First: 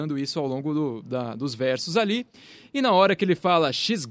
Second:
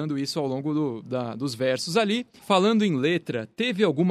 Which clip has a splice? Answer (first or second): second